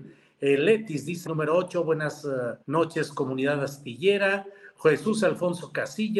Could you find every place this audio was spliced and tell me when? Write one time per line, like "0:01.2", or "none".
0:01.3
0:02.6